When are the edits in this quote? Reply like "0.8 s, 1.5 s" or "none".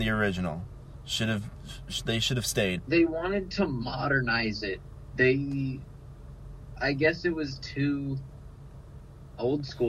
2.8 s

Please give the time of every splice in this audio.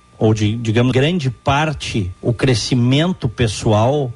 0.9 s, 2.2 s

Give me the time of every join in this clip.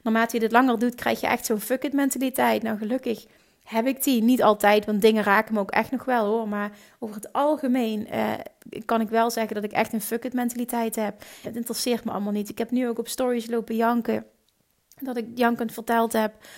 11.4 s

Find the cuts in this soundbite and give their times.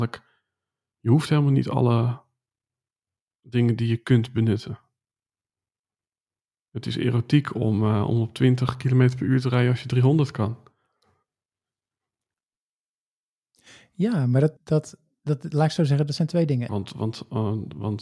14.6 s, 16.7 s

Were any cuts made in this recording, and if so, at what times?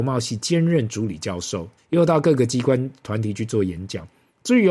1.8 s

